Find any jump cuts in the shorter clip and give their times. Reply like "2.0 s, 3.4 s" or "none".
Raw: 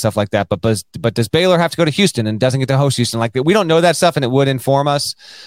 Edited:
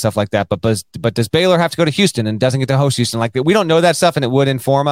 none